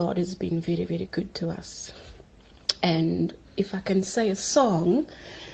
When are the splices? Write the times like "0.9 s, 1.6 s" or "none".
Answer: 3.4 s